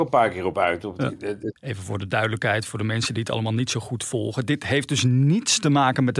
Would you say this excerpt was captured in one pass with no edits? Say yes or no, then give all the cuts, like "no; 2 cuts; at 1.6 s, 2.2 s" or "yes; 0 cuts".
no; 1 cut; at 1.6 s